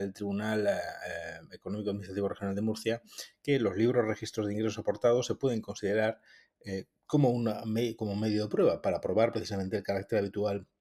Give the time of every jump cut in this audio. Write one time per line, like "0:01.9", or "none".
none